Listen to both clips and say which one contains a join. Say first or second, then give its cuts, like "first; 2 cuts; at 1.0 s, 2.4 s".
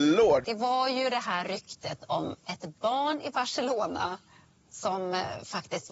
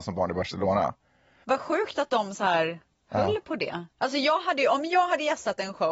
second; 2 cuts; at 1.4 s, 3.9 s